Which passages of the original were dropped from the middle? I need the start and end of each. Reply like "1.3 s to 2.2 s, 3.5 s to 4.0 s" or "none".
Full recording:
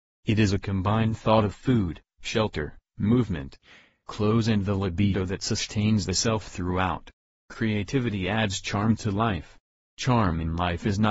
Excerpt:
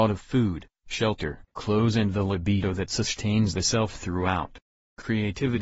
2.8 s to 4.0 s